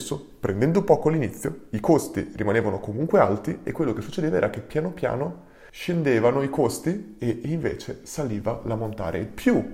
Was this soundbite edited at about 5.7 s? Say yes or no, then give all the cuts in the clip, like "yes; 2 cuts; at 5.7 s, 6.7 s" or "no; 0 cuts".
yes; 1 cut; at 5.7 s